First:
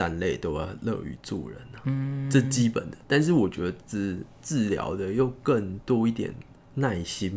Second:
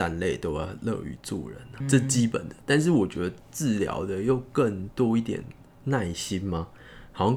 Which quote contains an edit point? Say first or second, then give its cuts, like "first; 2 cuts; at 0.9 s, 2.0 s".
second; 2 cuts; at 1.8 s, 3.4 s